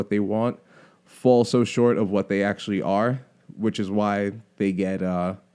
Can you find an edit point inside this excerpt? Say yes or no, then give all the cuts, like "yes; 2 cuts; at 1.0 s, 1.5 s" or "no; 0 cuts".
no; 0 cuts